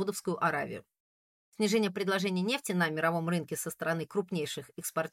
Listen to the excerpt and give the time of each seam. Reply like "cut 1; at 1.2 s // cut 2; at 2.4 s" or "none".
none